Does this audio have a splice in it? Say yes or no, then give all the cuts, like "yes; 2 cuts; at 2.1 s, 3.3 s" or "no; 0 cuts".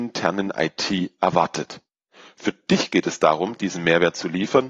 no; 0 cuts